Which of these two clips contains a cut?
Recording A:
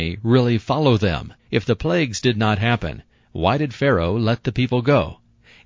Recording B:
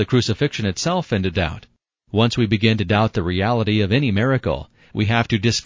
A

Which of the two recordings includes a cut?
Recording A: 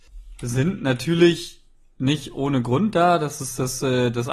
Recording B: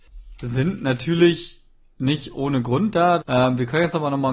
B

